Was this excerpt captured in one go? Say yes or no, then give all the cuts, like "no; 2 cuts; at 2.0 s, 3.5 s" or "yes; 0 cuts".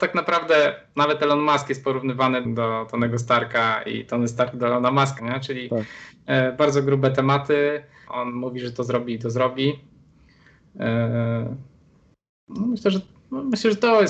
no; 3 cuts; at 2.4 s, 5.2 s, 8.1 s